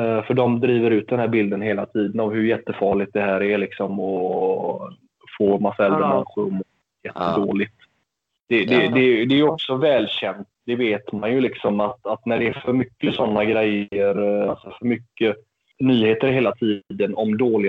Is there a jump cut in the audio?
no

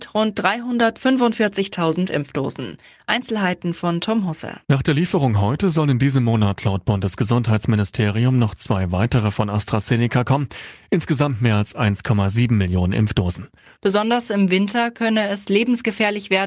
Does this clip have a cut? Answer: yes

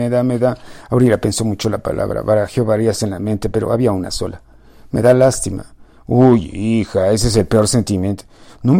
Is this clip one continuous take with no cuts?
yes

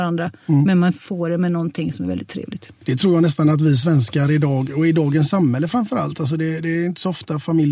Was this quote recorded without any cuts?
yes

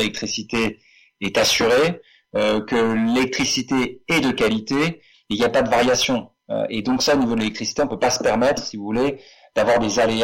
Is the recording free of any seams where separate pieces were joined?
yes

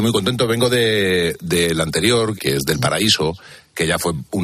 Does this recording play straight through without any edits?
no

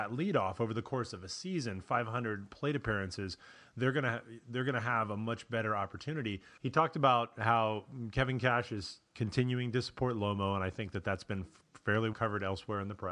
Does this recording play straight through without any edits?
no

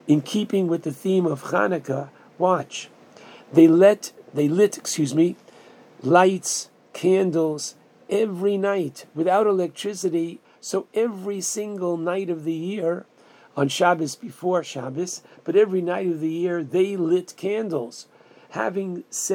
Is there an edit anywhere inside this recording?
yes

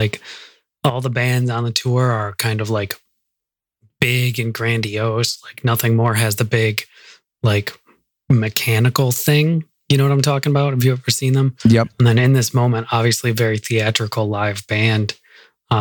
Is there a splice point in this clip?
no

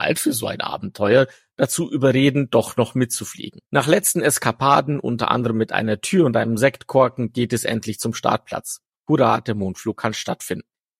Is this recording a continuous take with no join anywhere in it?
no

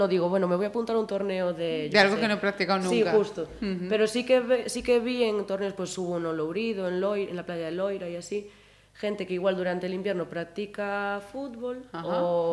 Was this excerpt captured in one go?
yes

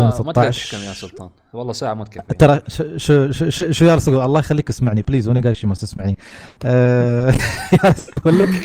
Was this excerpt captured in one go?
yes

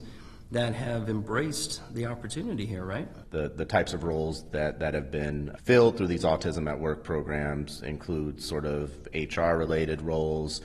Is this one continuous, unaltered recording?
no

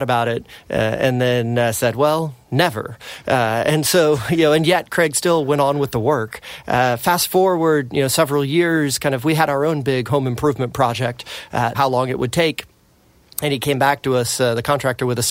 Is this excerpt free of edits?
no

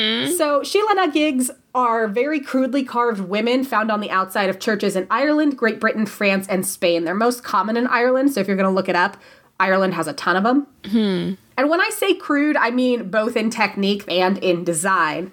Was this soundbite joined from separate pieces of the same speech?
yes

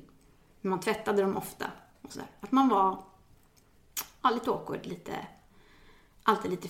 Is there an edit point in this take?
no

